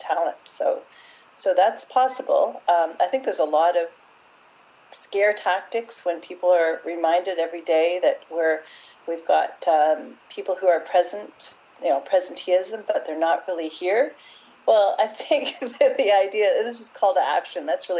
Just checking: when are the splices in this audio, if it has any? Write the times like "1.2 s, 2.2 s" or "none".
none